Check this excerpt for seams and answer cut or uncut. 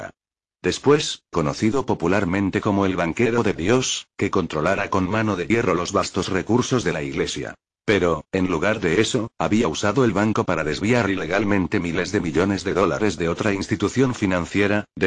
cut